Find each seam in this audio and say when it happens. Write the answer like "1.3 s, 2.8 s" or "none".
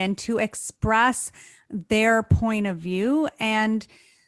none